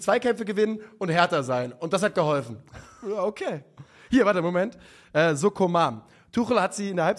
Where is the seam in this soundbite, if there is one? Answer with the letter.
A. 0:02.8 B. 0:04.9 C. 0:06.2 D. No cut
D